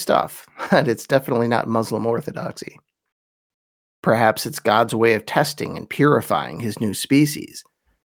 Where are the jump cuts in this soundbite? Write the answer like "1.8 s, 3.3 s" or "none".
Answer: 3.8 s